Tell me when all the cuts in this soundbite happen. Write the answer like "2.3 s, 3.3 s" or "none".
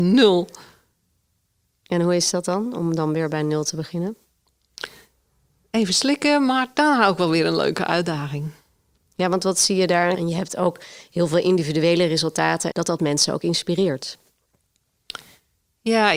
10.1 s, 12.7 s